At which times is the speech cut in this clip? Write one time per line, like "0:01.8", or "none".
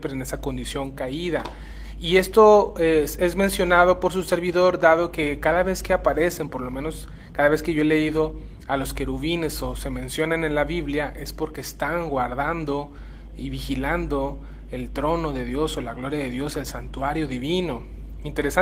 none